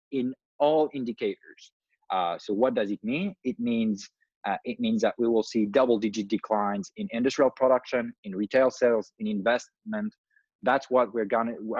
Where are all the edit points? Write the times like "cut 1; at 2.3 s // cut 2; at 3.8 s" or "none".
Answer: none